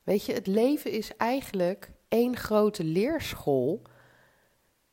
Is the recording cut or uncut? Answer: uncut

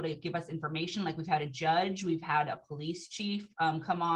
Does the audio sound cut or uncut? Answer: uncut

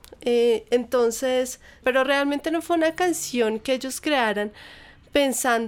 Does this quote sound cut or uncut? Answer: cut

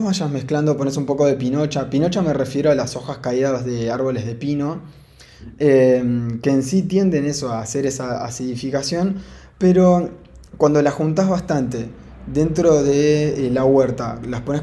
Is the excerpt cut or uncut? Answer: uncut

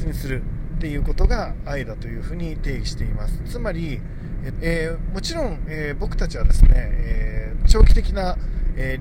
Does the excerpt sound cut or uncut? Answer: cut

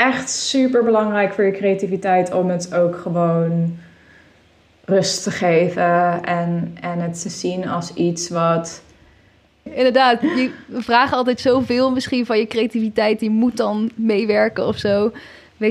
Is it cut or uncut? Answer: cut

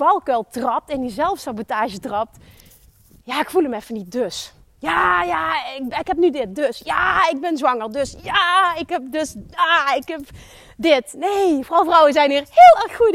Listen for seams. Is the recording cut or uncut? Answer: uncut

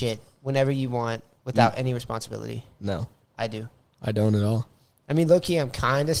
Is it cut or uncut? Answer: uncut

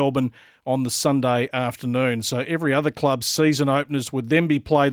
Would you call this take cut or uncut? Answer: uncut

